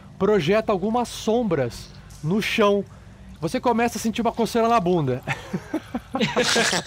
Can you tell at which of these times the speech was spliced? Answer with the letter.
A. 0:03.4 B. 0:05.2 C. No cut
A